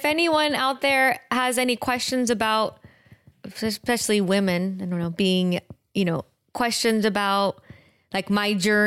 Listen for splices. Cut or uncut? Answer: uncut